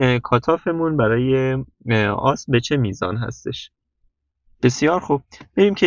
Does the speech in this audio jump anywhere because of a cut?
yes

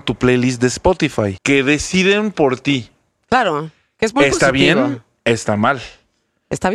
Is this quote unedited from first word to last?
no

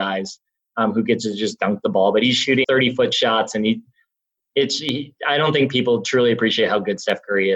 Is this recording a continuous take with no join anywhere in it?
no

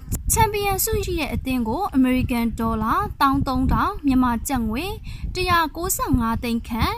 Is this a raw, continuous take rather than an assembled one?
no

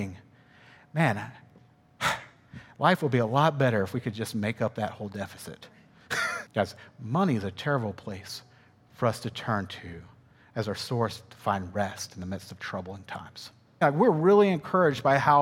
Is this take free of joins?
no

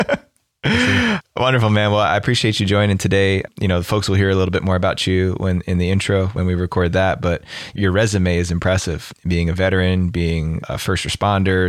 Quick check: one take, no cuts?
yes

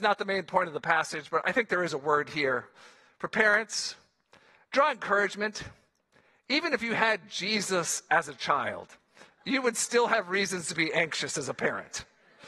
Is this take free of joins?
yes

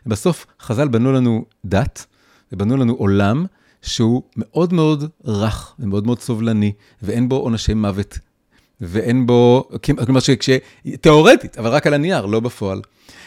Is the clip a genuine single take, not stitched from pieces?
yes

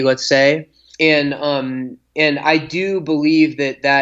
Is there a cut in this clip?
yes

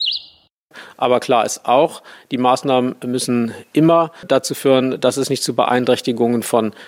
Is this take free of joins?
no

